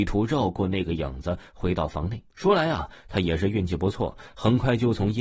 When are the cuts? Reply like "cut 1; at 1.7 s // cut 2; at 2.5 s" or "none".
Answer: cut 1; at 2.3 s